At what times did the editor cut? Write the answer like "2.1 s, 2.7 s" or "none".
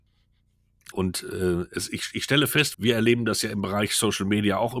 0.9 s, 2.7 s